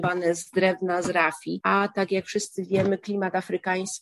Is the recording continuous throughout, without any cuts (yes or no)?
yes